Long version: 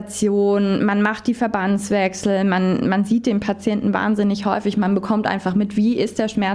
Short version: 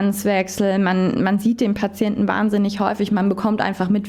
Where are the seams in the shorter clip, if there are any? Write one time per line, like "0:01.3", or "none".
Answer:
none

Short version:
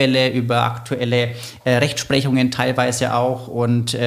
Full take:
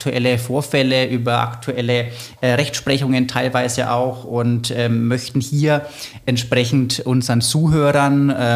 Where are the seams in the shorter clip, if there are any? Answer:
none

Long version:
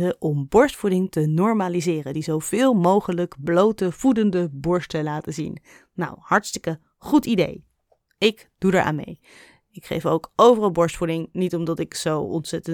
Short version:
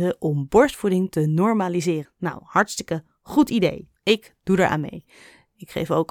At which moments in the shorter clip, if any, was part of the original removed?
0:02.0
0:04.0

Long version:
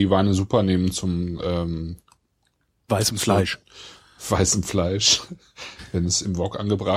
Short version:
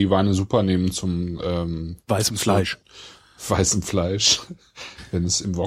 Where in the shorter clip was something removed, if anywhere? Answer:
0:02.0

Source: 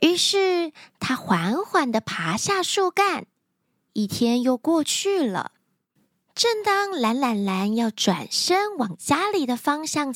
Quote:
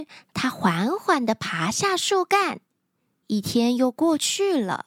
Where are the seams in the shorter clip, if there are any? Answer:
none

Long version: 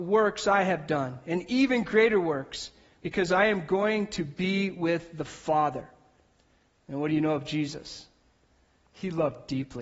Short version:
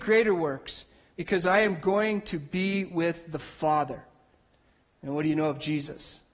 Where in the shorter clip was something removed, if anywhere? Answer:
none

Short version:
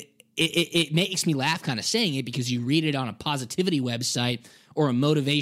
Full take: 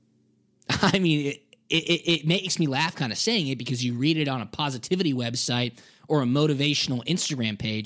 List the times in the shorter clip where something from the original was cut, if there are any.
none

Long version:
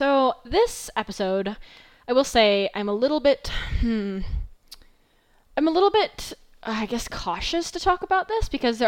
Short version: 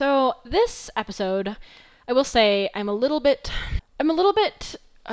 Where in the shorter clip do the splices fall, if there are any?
0:03.8

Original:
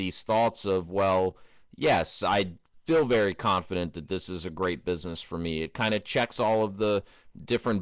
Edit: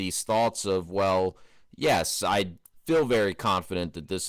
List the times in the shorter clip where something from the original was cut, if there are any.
none

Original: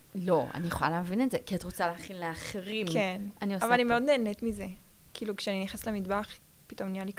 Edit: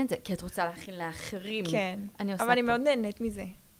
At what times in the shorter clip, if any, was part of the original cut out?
none

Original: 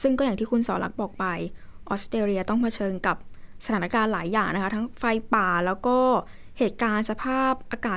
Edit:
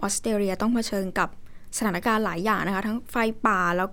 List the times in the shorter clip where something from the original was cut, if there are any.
none

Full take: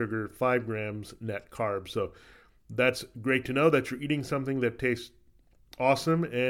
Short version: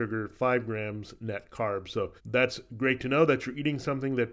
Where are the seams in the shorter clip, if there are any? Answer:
0:02.2

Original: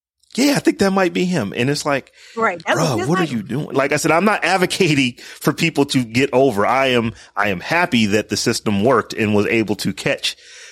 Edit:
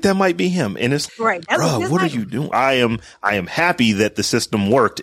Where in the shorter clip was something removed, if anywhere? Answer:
0:01.1
0:02.5

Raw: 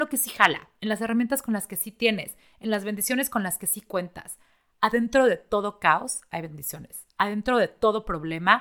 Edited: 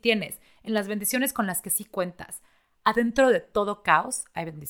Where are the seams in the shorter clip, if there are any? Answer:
none

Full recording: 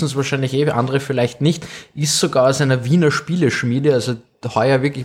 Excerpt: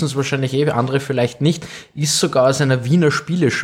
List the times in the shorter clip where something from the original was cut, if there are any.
none

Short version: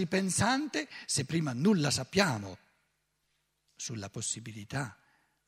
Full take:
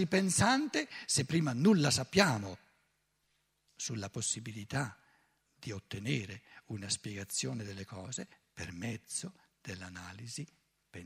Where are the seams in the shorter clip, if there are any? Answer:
none

